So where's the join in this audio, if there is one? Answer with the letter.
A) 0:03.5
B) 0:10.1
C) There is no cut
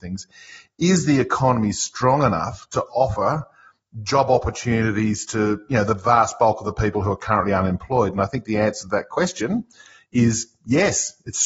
C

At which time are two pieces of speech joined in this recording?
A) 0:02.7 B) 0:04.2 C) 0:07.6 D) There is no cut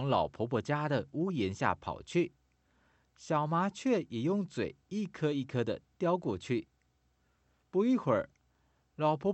D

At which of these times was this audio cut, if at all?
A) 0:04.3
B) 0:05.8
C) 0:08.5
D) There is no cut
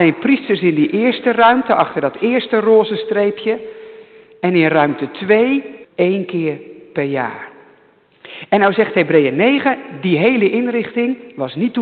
B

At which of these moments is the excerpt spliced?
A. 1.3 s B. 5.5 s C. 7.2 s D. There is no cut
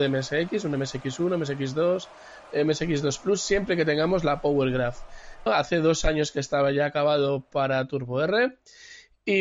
B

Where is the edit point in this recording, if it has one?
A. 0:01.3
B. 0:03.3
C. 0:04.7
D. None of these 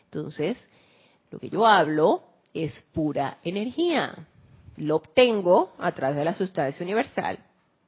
D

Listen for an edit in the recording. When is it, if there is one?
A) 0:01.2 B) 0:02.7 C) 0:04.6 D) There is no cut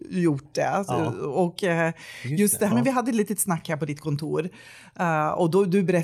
B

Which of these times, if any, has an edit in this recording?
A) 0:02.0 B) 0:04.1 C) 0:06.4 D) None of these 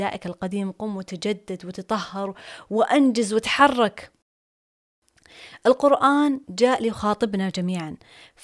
C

